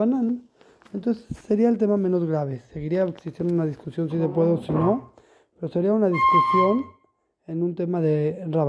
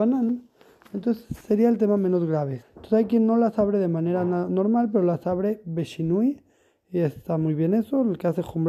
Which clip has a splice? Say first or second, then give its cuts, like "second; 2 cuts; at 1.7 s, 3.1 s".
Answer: second; 1 cut; at 2.6 s